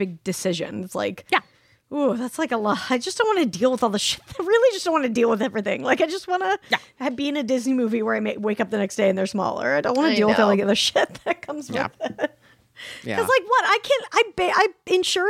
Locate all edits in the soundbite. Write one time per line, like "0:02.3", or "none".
none